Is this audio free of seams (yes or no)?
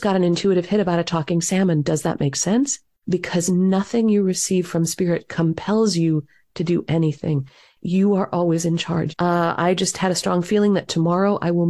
no